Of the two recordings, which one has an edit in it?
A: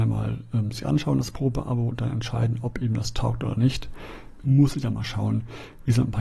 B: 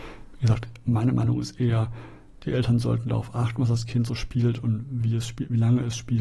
A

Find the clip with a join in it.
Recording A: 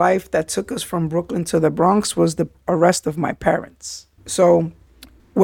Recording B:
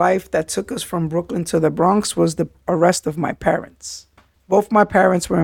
A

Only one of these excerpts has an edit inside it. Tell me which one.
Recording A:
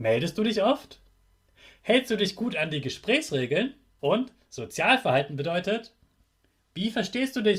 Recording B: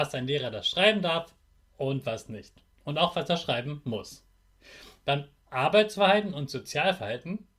A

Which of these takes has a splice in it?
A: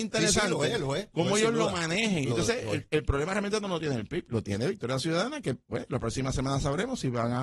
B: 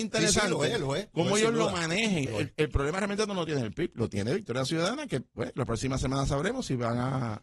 B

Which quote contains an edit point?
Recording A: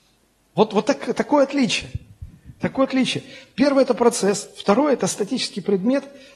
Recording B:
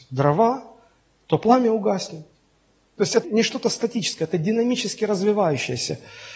B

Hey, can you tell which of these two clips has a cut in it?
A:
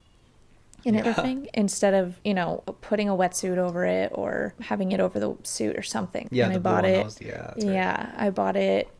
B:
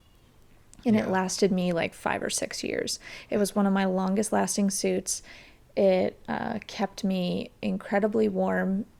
A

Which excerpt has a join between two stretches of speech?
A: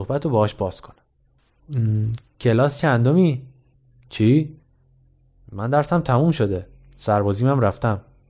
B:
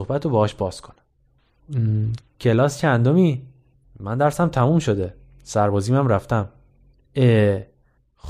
B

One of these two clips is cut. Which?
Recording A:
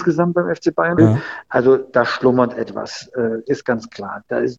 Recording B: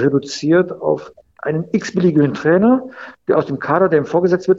A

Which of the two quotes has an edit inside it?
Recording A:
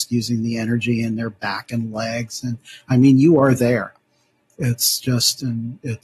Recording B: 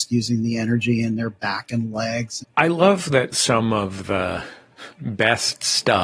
B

